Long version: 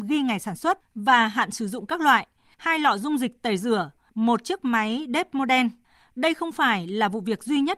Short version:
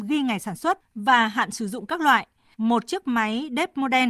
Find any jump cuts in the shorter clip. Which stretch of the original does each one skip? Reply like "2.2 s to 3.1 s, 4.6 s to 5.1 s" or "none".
2.6 s to 4.1 s

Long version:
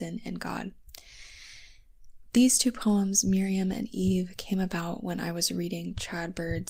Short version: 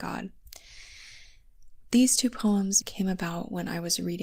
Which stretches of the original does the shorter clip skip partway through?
3.2 s to 4.3 s

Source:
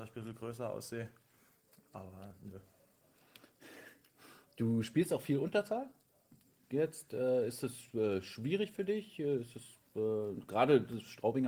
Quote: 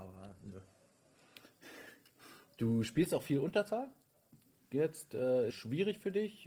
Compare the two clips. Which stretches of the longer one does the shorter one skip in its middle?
7.5 s to 8.2 s

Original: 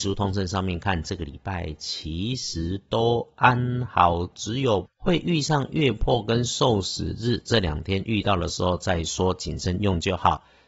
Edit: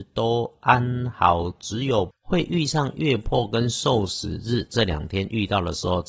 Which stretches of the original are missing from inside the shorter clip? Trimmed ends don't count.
none

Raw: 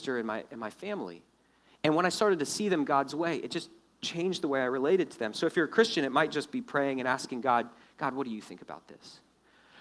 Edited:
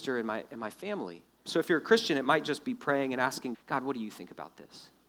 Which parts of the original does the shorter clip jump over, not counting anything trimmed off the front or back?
1.5 s to 5.3 s, 7.4 s to 7.9 s

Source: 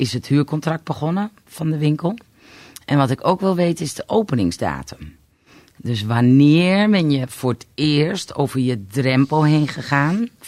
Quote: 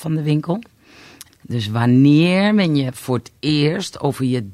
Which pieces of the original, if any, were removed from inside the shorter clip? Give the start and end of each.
2.8 s to 5.6 s

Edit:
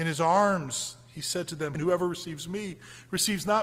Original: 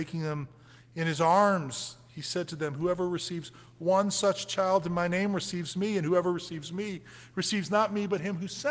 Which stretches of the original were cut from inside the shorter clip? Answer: 2.7 s to 6.0 s

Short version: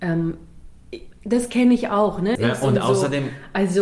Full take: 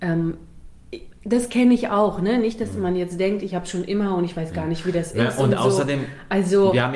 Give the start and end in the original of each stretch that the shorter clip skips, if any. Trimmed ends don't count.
2.4 s to 5.1 s

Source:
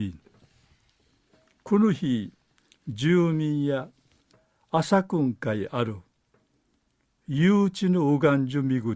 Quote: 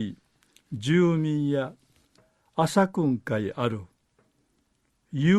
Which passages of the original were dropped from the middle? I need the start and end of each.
none

